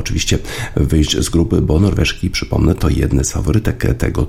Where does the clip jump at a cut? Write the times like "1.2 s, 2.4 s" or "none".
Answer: none